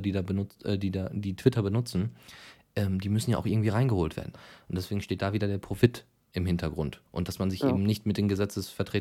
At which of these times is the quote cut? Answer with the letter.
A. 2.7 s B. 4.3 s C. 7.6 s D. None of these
B